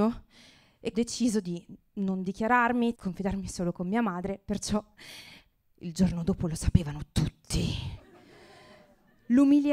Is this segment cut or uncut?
cut